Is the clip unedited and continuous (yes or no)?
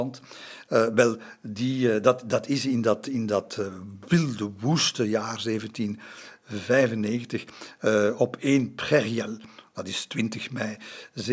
yes